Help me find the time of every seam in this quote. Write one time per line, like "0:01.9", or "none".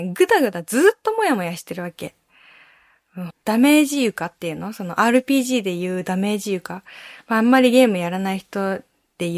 0:03.3